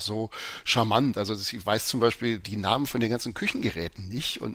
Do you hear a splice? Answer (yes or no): no